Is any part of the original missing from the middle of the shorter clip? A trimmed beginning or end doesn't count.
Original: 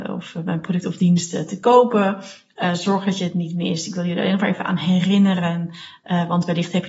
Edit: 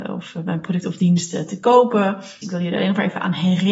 yes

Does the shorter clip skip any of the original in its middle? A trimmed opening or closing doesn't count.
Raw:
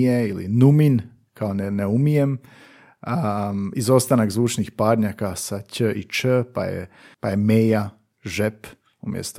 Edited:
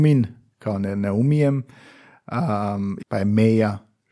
yes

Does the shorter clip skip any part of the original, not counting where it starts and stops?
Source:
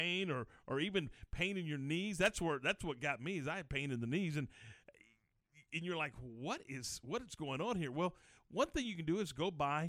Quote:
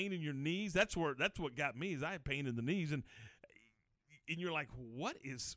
no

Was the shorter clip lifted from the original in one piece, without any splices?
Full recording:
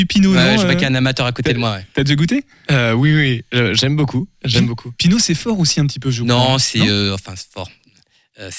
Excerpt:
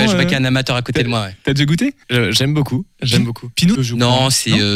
no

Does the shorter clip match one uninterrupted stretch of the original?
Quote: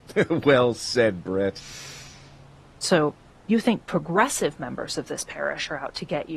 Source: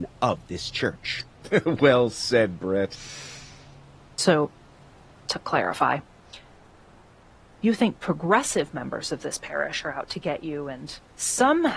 no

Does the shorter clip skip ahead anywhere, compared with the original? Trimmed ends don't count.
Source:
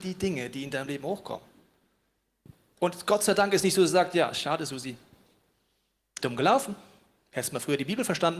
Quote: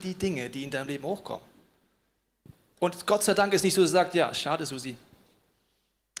no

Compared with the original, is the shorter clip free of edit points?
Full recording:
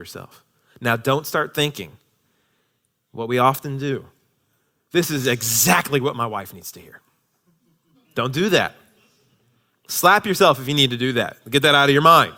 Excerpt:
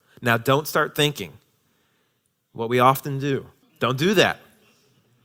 no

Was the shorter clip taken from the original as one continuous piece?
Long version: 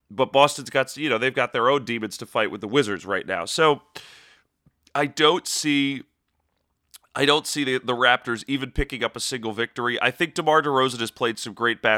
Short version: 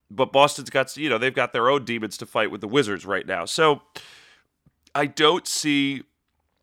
yes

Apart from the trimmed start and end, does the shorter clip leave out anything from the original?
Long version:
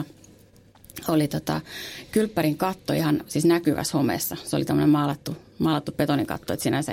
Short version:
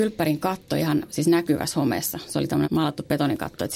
yes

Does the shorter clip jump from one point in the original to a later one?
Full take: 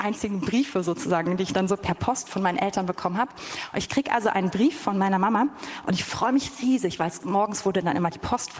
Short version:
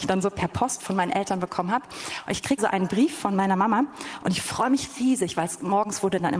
yes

